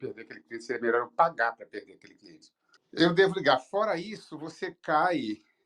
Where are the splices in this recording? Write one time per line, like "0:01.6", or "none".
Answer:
0:02.8